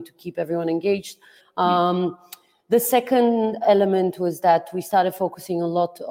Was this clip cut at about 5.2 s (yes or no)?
no